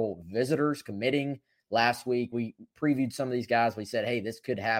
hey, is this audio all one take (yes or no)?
no